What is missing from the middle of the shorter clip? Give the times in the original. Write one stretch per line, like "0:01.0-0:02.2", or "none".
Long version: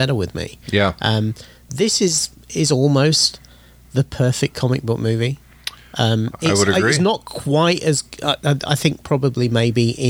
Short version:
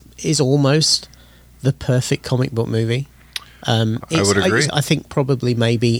0:07.0-0:08.6